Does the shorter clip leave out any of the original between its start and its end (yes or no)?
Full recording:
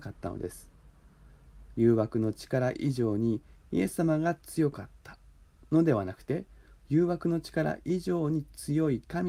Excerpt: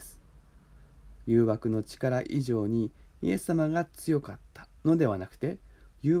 yes